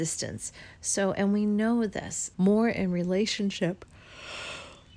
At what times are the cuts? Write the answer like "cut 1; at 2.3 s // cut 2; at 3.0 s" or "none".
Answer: cut 1; at 2.3 s